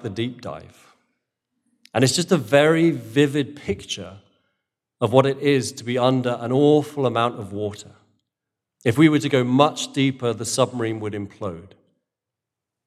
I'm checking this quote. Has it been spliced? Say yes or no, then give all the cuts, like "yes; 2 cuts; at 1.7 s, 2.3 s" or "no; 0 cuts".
yes; 1 cut; at 8.8 s